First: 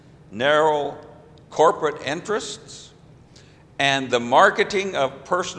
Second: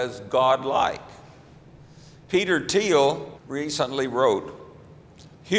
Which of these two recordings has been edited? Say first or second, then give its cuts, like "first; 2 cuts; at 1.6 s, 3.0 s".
second; 1 cut; at 3.3 s